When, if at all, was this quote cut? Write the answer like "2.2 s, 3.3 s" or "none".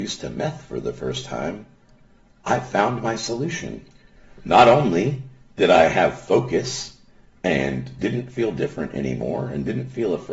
none

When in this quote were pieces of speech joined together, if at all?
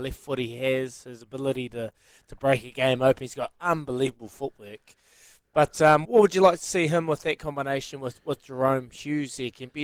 6.0 s

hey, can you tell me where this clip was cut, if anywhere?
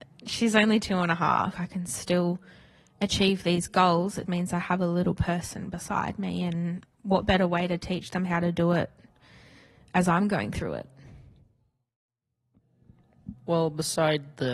1.5 s, 4.3 s

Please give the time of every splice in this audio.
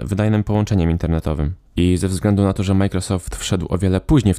none

